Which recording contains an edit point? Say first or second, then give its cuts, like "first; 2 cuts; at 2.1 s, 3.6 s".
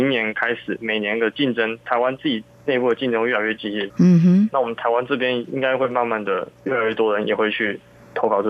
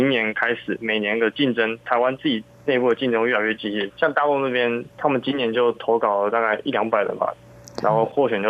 first; 1 cut; at 3.9 s